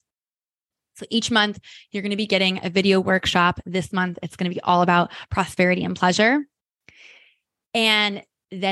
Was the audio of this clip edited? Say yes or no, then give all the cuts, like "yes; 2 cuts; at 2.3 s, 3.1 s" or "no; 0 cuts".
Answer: no; 0 cuts